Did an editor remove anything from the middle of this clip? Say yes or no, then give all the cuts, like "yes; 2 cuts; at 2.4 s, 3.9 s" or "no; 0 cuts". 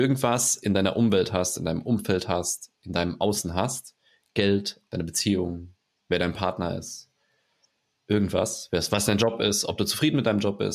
yes; 1 cut; at 4.9 s